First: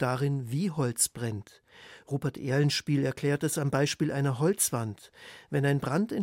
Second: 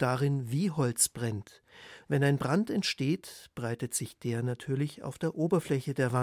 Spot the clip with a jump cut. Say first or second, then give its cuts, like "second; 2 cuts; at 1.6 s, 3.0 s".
second; 1 cut; at 2.0 s